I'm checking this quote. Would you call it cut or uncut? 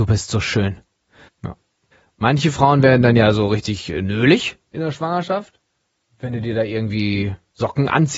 cut